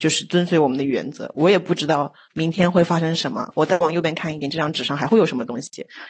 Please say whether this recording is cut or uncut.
uncut